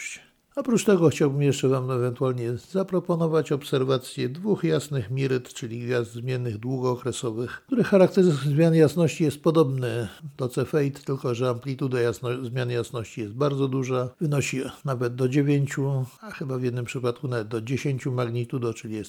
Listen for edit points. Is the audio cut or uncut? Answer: uncut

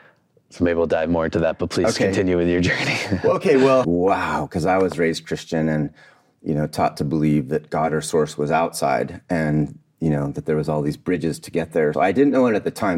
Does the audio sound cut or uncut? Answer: cut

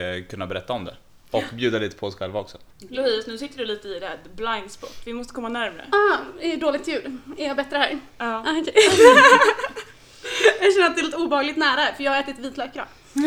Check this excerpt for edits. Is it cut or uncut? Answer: uncut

